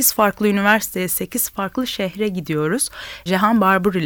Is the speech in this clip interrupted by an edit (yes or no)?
no